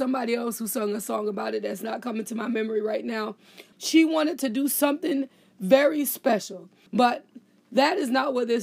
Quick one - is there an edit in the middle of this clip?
yes; 2 cuts; at 3.7 s, 6.9 s

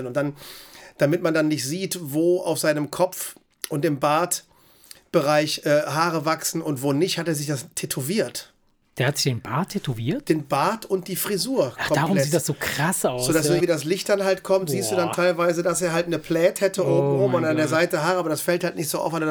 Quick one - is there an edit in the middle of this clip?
yes; 1 cut; at 13.6 s

